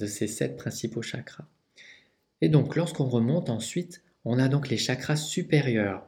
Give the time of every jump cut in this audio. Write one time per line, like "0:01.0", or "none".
none